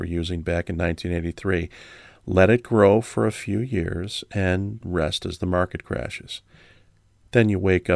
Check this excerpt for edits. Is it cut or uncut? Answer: cut